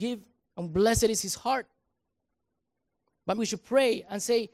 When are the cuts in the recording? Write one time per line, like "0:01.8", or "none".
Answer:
0:03.4

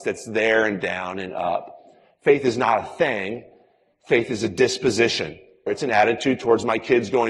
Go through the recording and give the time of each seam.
0:05.7

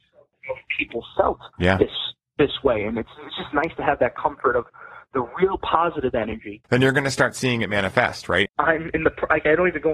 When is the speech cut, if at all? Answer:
0:01.5
0:06.6
0:08.5

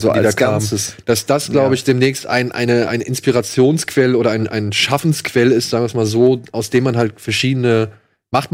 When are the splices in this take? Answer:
none

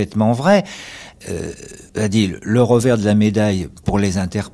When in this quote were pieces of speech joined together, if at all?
0:01.9

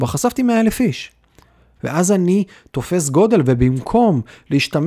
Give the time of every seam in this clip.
0:01.8

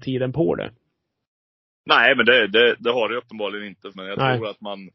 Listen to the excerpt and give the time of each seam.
0:03.9

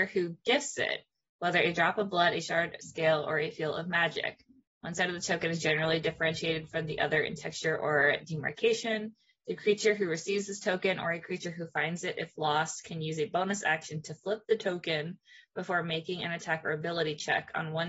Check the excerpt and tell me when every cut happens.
none

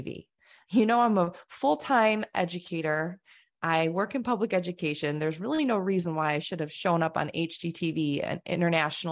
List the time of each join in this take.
none

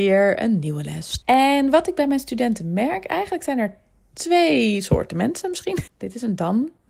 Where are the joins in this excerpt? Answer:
0:01.2
0:05.9

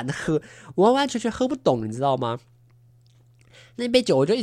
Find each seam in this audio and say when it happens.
none

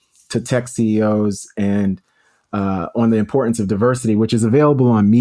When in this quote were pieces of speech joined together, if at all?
none

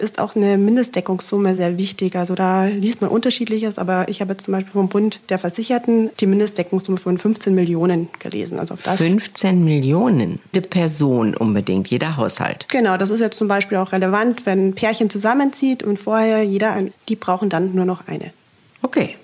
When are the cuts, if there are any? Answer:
0:01.6
0:10.5
0:16.9

